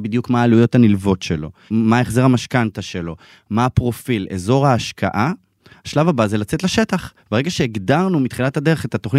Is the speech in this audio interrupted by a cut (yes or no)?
no